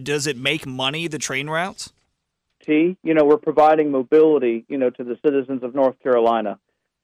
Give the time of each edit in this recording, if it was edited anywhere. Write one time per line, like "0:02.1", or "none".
0:02.6